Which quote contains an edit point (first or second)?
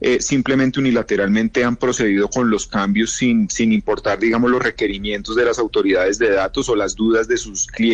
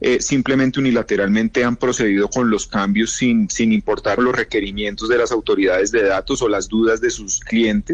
second